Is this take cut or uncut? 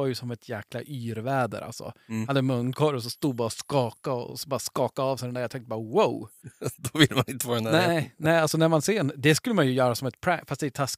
uncut